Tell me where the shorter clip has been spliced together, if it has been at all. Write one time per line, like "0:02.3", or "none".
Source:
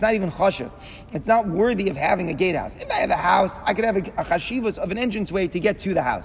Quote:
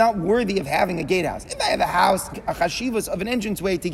0:02.3

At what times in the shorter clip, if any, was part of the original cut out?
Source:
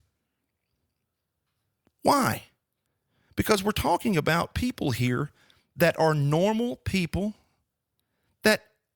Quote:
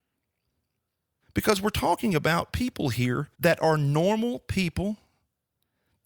0:01.2
0:03.3

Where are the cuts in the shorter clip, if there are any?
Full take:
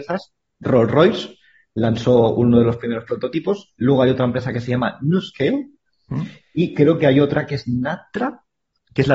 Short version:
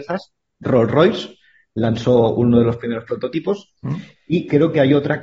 0:03.8

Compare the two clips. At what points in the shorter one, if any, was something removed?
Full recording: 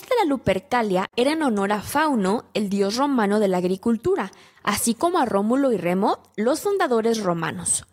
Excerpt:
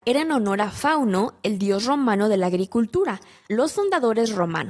0:03.5

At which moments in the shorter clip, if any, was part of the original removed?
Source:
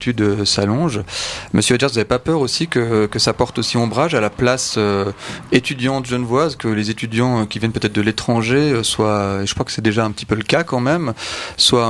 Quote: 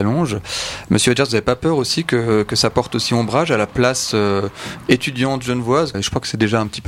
0:05.9

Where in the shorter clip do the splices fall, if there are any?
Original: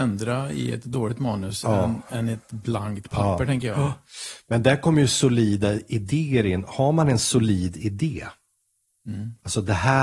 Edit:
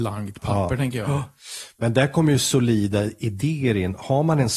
none

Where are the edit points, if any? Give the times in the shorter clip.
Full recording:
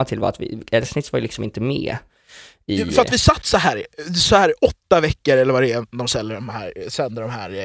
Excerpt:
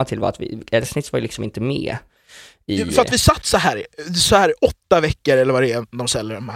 none

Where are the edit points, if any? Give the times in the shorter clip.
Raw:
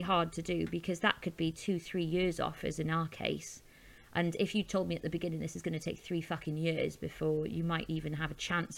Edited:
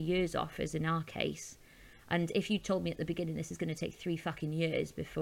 none

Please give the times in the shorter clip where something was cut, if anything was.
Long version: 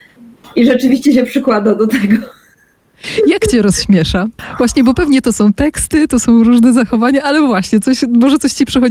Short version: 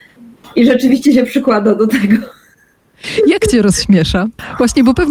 none

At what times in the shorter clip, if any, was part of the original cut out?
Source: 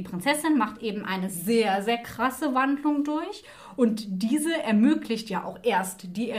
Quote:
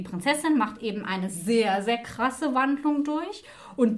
none

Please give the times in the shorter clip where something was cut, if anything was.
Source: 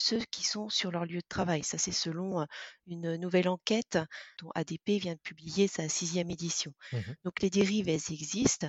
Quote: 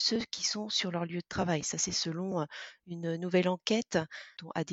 none

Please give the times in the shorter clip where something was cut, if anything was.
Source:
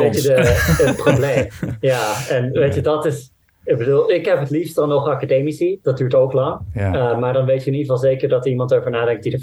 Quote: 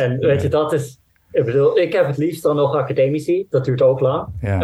none

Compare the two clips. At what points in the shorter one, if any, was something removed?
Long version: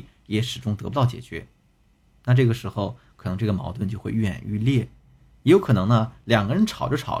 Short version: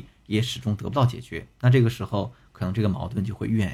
0:01.5

